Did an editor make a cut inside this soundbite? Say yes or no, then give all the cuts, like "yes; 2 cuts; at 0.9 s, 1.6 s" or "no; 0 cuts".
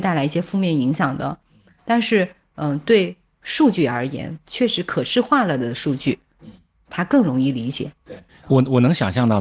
no; 0 cuts